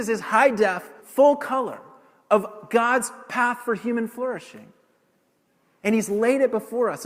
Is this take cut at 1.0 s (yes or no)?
yes